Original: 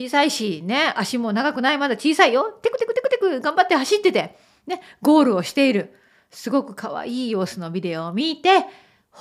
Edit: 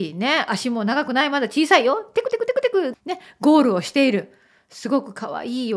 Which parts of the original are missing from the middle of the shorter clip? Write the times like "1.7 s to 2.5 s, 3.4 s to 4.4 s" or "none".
3.4 s to 4.6 s